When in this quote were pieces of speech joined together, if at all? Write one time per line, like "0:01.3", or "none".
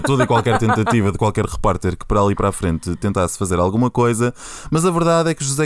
none